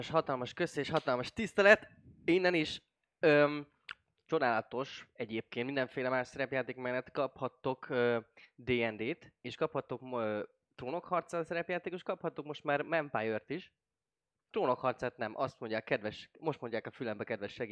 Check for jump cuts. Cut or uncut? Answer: uncut